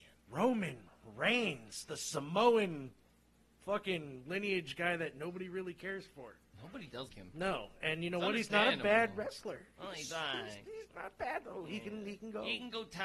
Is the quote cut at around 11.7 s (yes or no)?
no